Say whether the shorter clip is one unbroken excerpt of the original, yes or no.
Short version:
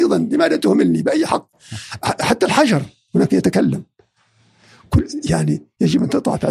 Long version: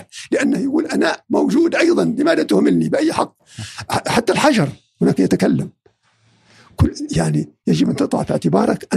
yes